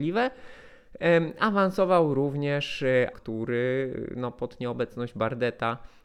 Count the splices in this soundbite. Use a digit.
1